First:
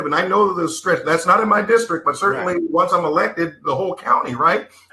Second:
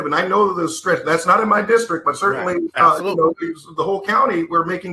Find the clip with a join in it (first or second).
second